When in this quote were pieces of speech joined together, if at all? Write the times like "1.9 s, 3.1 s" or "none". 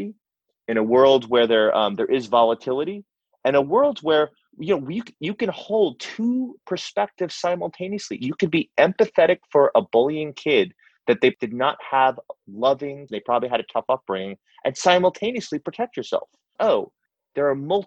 13.1 s, 16.6 s